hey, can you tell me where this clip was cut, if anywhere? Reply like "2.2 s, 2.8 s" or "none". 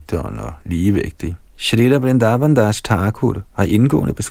1.5 s